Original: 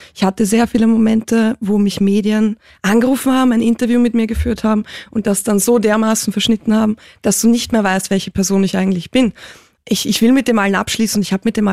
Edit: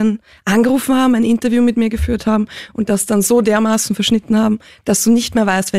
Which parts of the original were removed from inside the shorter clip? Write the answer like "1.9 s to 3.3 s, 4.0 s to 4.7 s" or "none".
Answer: none